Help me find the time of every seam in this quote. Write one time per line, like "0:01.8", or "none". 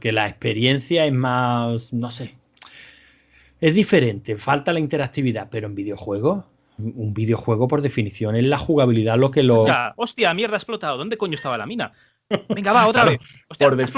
0:09.6